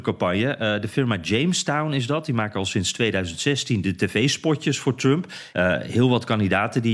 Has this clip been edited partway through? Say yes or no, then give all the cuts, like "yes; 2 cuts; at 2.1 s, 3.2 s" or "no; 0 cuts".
yes; 1 cut; at 5.5 s